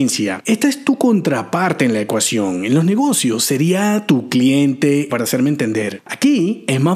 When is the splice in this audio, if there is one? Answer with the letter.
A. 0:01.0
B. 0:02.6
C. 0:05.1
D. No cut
C